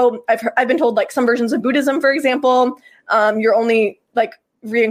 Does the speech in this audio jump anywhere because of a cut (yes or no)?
no